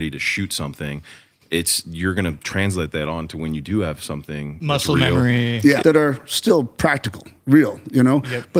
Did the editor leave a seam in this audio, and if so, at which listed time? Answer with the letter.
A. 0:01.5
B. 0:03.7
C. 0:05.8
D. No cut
C